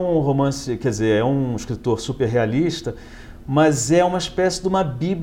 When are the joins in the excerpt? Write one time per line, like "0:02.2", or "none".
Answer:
none